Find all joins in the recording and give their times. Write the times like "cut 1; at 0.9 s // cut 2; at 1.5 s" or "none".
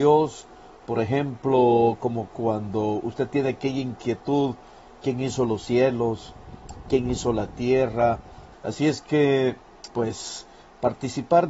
cut 1; at 8.5 s // cut 2; at 9.9 s